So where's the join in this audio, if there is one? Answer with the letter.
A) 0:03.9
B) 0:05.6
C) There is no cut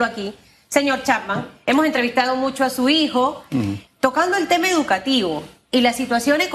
A